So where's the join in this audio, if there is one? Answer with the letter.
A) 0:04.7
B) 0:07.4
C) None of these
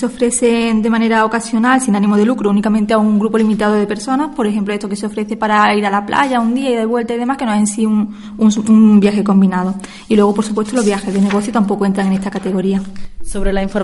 B